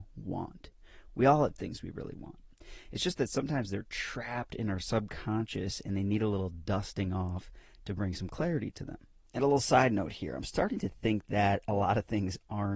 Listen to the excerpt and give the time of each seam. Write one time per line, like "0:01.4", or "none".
none